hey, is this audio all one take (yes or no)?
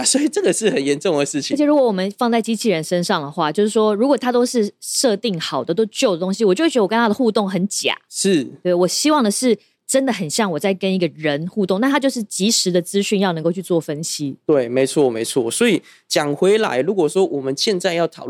yes